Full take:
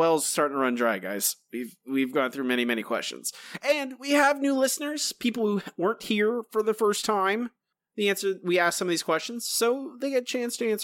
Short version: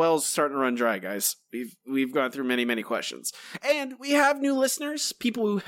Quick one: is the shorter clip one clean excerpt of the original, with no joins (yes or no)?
yes